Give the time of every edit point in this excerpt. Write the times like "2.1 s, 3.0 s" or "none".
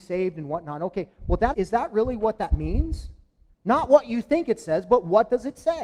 1.5 s, 3.5 s

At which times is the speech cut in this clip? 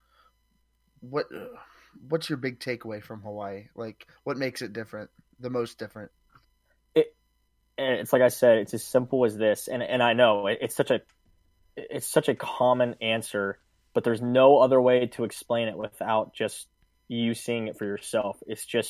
none

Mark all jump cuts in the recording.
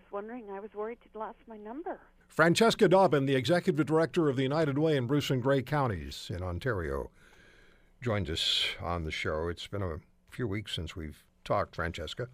2.2 s

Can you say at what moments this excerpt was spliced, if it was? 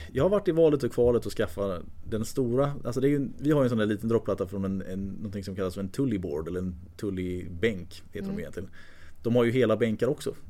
none

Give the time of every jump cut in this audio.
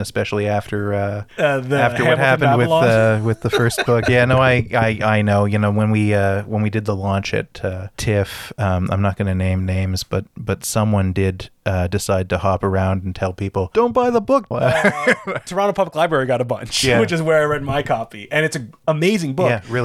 14.5 s

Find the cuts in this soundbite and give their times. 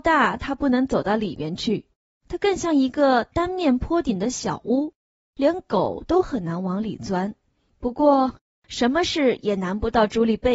none

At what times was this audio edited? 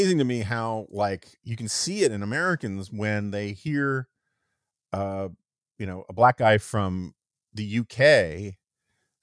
none

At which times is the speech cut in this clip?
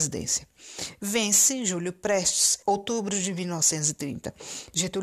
2.6 s

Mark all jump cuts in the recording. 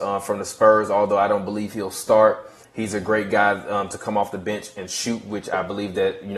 none

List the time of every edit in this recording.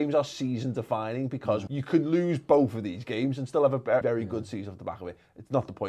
1.7 s, 4.0 s

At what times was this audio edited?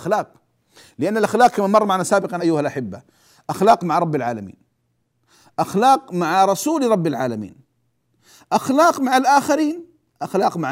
2.4 s

